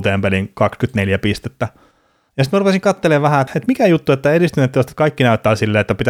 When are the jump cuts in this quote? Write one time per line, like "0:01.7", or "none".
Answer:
0:03.5